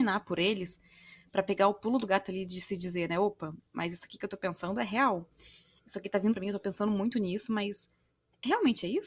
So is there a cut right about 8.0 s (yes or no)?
no